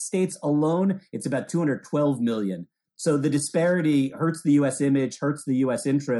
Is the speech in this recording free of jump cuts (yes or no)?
yes